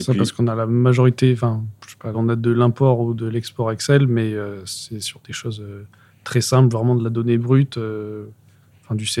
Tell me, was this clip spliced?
yes; 1 cut; at 2.1 s

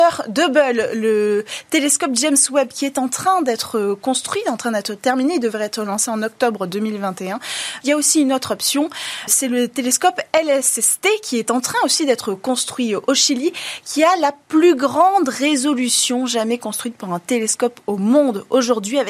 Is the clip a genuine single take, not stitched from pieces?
no; 2 cuts; at 7.8 s, 9.3 s

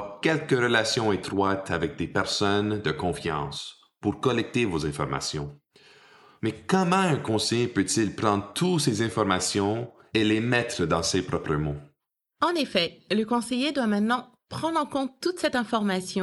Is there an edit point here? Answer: no; 0 cuts

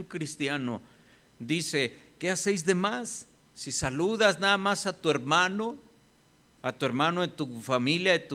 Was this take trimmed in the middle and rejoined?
yes; 3 cuts; at 2.2 s, 3.4 s, 6.4 s

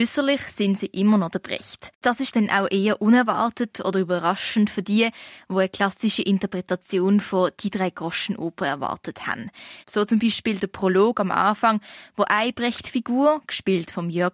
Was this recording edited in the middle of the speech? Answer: yes; 1 cut; at 9.8 s

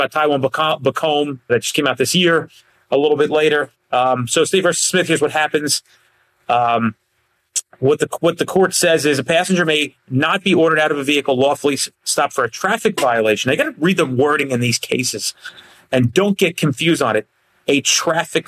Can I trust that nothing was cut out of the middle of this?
no; 1 cut; at 1.5 s

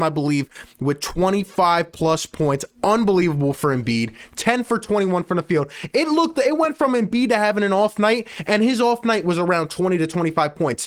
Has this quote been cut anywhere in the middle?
no; 0 cuts

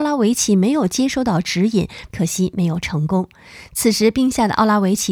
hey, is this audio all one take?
no; 1 cut; at 2.1 s

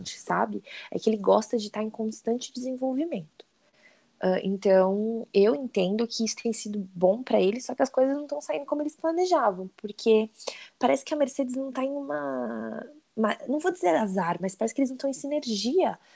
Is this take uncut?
yes; 0 cuts

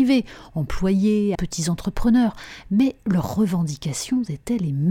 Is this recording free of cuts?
no; 1 cut; at 1.4 s

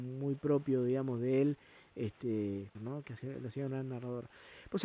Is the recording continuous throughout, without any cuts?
no; 1 cut; at 2.7 s

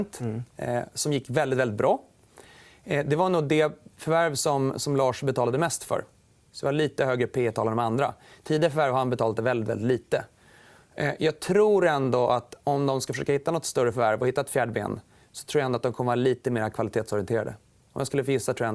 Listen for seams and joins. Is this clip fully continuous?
yes; 0 cuts

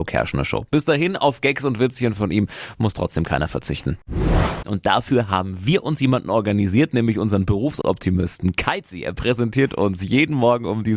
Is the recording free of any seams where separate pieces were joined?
no; 1 cut; at 4.6 s

